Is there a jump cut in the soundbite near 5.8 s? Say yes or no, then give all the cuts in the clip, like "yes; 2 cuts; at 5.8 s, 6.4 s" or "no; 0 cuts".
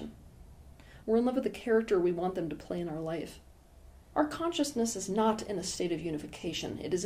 no; 2 cuts; at 1.0 s, 4.1 s